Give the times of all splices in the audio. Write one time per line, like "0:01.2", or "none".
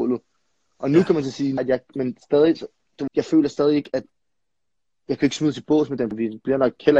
0:01.6
0:03.1
0:06.1